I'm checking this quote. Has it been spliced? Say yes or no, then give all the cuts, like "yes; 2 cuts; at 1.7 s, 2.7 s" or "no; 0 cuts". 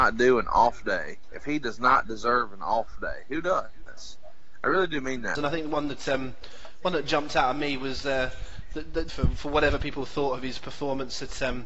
yes; 2 cuts; at 5.3 s, 9.1 s